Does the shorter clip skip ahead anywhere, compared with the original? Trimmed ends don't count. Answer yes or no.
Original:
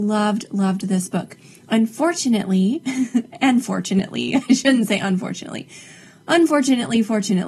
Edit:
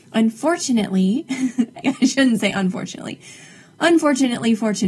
yes